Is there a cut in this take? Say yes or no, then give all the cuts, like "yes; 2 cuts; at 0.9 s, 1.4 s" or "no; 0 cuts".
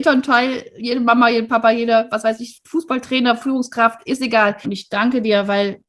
yes; 1 cut; at 4.6 s